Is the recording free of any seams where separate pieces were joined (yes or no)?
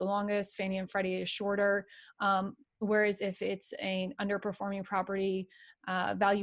yes